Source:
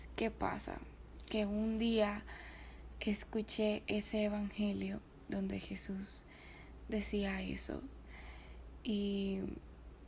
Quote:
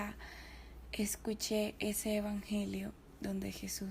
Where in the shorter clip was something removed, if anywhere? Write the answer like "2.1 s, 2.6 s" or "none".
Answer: none

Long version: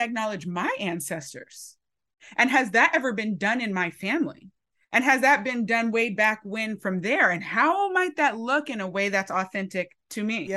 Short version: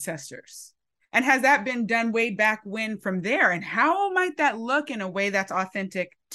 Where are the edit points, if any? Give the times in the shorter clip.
1.0 s

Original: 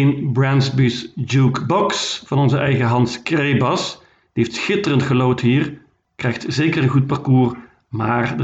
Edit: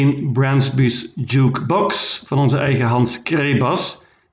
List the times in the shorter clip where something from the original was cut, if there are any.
none

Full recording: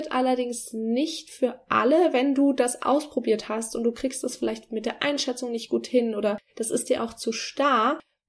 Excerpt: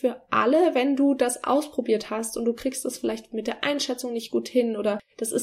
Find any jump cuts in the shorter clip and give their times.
none

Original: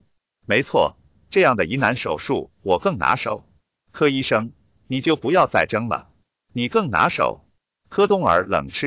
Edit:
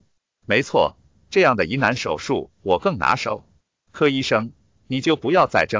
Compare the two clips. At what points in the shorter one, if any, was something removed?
none

